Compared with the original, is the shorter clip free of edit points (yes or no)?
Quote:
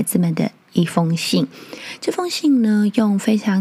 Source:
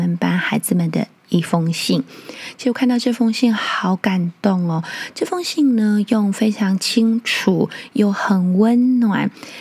no